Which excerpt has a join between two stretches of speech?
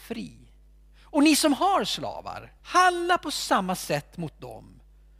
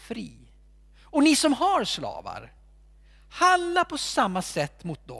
first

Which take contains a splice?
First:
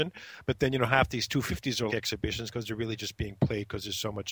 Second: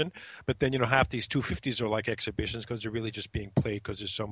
first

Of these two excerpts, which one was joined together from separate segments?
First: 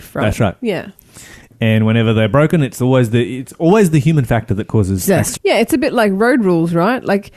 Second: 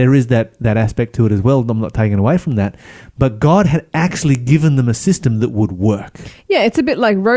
first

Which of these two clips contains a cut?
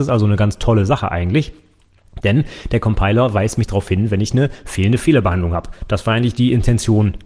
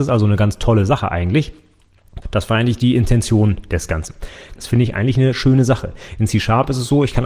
second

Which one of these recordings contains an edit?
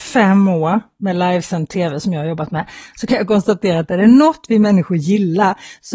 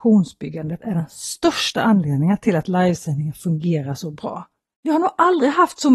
second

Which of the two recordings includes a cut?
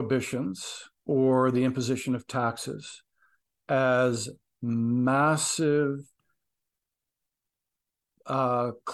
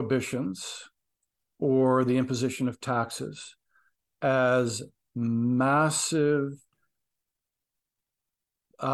first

